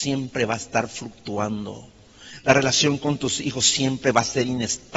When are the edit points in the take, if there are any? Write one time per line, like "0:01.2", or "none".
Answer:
none